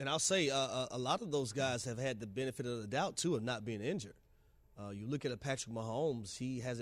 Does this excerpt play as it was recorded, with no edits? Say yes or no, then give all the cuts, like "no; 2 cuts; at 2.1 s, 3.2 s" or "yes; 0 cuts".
yes; 0 cuts